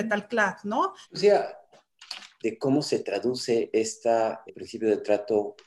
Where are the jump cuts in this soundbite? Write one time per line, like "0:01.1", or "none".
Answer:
0:01.0
0:02.4
0:04.5